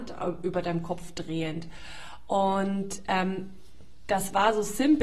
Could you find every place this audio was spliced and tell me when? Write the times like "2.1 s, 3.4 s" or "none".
none